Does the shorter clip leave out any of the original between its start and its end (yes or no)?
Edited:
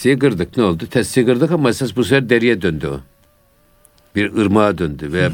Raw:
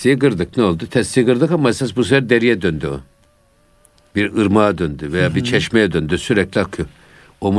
no